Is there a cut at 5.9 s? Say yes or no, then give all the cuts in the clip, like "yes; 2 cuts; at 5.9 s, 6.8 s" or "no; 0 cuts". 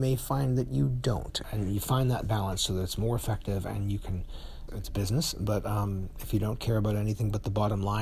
no; 2 cuts; at 1.4 s, 4.7 s